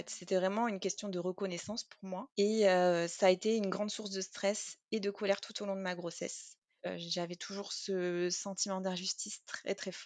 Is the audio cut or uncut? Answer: cut